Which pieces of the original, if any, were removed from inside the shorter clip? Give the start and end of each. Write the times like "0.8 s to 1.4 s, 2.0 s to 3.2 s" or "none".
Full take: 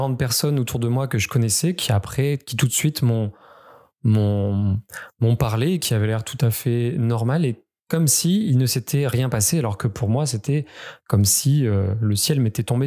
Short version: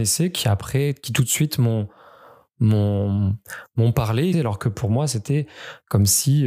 5.8 s to 9.5 s